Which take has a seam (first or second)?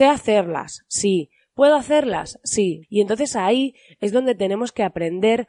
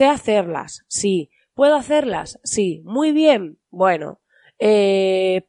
first